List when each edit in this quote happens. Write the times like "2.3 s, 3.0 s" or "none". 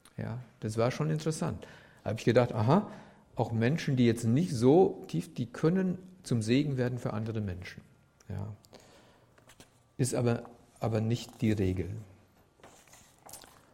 none